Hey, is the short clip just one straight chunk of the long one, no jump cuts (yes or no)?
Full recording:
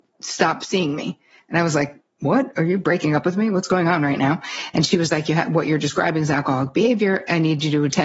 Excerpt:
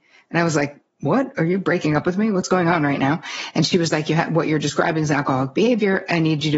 yes